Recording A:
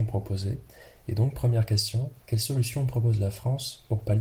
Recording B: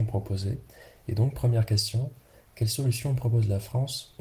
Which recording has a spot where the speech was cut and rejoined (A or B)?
A